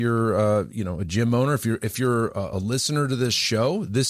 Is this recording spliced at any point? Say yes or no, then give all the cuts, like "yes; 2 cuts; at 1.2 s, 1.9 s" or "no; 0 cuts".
no; 0 cuts